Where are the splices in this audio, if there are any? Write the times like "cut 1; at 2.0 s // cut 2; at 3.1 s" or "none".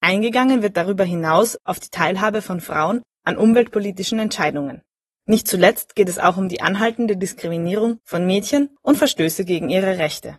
none